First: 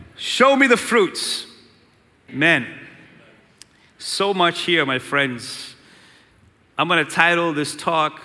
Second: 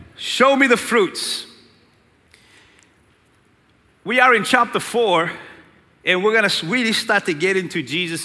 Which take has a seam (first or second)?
first